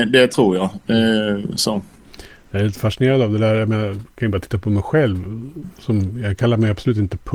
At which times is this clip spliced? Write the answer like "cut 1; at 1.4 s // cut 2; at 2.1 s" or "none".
none

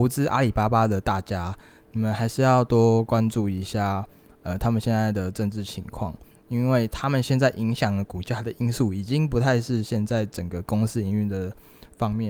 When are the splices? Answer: none

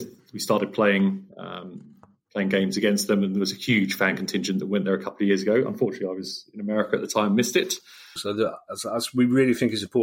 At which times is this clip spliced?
cut 1; at 8.2 s

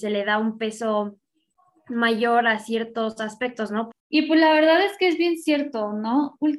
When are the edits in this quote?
cut 1; at 3.9 s

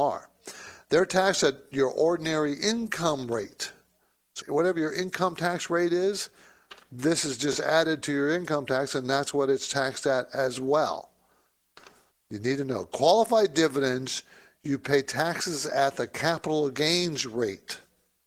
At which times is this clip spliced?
cut 1; at 4.4 s // cut 2; at 12.1 s

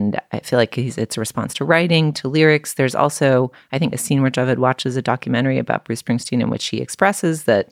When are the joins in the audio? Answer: cut 1; at 3.9 s

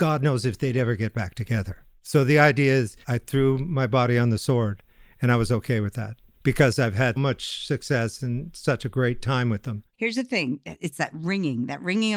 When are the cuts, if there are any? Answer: cut 1; at 3.0 s // cut 2; at 7.2 s // cut 3; at 9.9 s

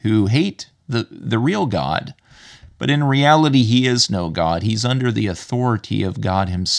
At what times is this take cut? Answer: none

